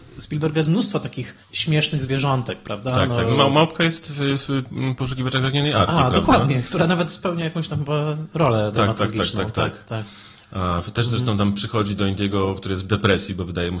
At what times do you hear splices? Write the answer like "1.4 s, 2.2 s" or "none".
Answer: 1.4 s